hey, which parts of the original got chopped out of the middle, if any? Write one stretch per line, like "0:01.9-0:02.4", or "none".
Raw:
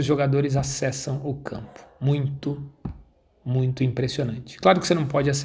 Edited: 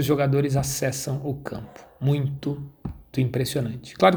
0:03.1-0:03.8